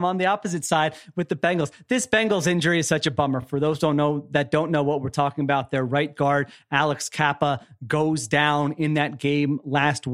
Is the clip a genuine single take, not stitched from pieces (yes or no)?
yes